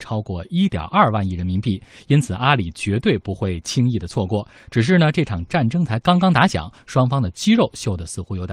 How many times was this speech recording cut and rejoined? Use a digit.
0